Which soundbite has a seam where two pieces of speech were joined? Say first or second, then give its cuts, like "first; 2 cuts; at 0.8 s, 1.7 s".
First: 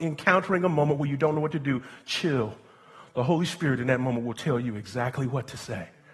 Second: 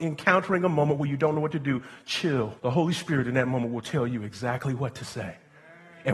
second; 1 cut; at 2.6 s